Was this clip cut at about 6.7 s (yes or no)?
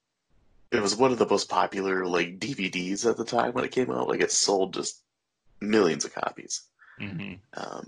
no